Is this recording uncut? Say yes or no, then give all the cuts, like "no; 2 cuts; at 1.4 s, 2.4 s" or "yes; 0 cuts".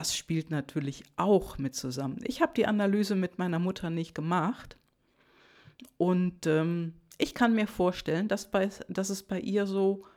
yes; 0 cuts